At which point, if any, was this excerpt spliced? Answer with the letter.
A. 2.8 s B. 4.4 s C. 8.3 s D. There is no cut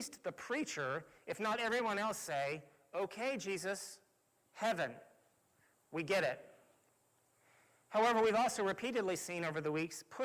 B